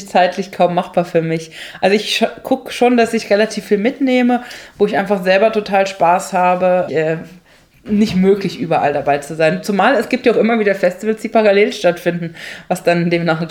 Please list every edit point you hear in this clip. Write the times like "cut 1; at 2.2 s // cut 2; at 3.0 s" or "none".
cut 1; at 6.9 s